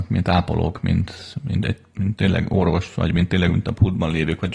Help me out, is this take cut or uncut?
uncut